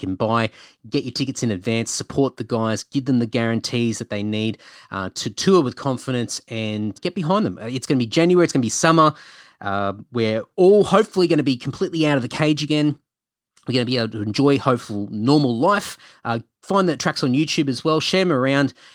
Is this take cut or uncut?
cut